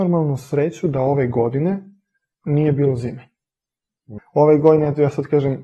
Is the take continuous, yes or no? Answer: no